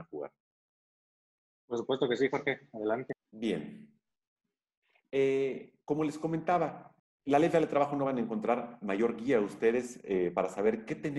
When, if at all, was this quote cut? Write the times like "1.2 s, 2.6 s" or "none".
none